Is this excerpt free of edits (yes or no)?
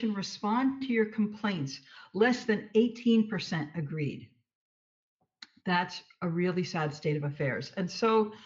yes